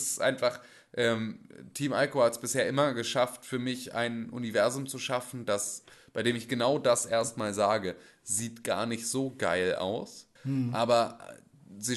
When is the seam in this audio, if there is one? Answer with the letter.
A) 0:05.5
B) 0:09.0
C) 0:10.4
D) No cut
C